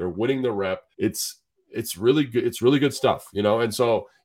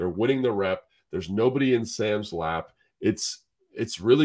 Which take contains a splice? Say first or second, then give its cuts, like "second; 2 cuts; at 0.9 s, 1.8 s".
first; 1 cut; at 0.9 s